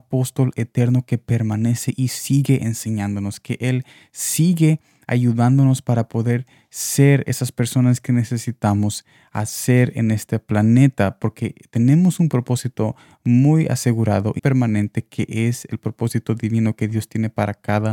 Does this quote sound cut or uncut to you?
cut